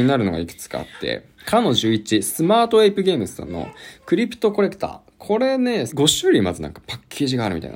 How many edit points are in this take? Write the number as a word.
two